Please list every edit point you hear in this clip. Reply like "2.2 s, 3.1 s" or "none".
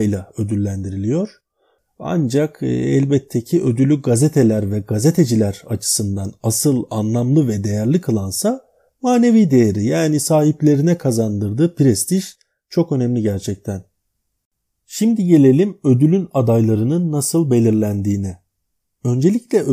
none